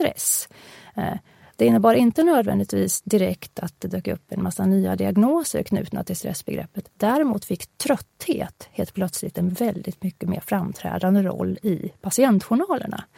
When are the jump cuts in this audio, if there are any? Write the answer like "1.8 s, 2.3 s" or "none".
none